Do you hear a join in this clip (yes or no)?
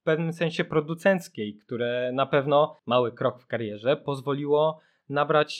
yes